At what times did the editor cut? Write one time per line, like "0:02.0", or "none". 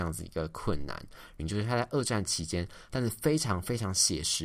0:01.4
0:02.9